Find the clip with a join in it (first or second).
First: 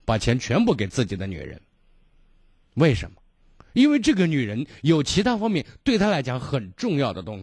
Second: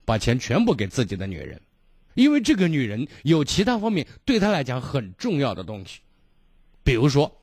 second